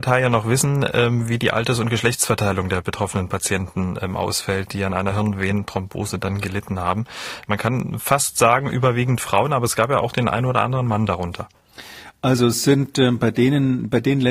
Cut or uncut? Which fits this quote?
uncut